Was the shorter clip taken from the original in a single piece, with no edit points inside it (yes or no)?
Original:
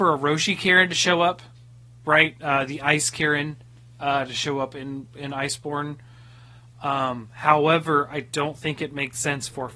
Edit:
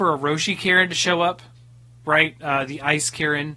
yes